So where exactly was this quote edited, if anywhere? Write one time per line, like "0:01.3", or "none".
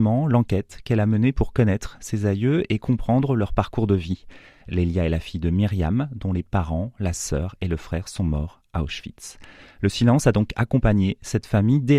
none